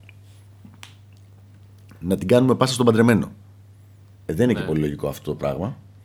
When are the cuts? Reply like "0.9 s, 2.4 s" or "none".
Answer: none